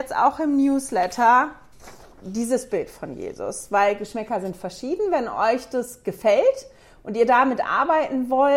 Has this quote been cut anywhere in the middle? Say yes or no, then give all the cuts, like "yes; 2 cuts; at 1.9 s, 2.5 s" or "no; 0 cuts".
no; 0 cuts